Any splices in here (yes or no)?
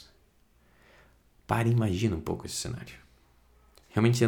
no